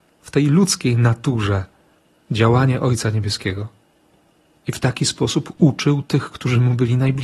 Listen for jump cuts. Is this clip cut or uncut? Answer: uncut